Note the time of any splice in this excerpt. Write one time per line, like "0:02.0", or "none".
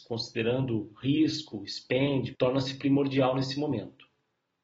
0:02.3